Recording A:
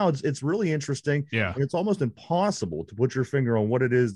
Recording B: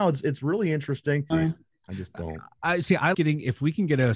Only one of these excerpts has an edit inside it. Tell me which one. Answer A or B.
B